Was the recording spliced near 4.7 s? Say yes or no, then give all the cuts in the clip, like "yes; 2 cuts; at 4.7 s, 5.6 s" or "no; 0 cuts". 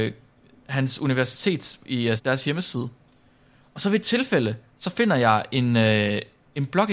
no; 1 cut; at 2.2 s